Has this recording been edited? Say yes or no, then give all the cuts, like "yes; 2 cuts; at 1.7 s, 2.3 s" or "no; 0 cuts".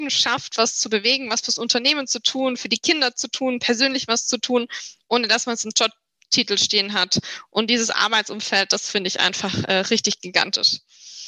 no; 0 cuts